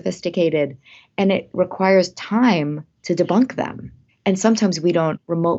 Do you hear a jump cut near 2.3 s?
no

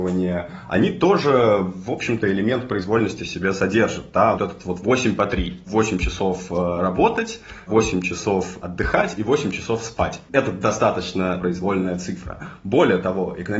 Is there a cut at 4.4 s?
yes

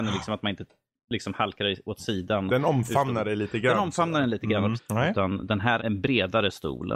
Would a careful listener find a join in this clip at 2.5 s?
no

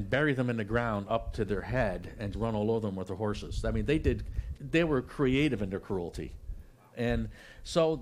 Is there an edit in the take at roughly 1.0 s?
no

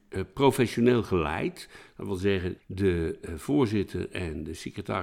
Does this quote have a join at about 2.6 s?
yes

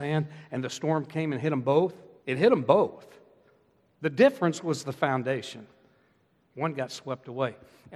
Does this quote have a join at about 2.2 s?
yes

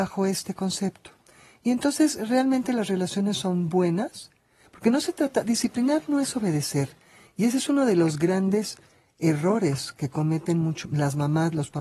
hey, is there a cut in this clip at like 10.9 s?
yes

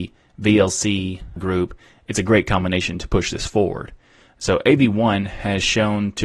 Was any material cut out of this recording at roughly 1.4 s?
yes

